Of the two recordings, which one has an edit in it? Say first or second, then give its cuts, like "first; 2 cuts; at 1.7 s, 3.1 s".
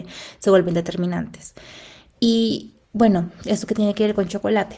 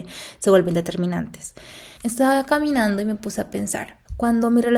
second; 1 cut; at 2.0 s